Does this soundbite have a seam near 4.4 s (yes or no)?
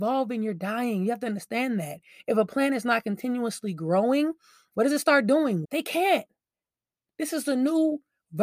no